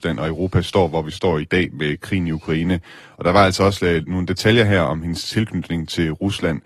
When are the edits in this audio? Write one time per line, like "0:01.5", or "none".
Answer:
none